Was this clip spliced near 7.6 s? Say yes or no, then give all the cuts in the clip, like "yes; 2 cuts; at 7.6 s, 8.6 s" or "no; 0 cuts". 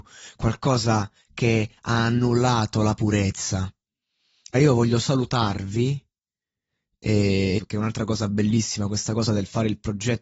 yes; 2 cuts; at 4.5 s, 7.6 s